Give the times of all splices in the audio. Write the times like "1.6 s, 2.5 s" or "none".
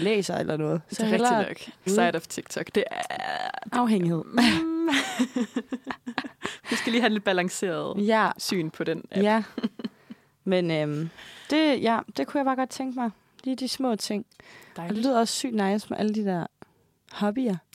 1.9 s